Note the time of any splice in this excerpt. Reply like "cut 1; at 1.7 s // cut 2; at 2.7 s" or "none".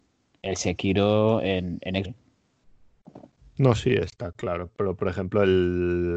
cut 1; at 2.0 s